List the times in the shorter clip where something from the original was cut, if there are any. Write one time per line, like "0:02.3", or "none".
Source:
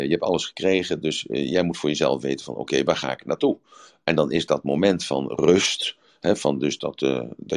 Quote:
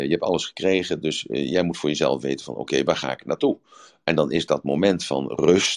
none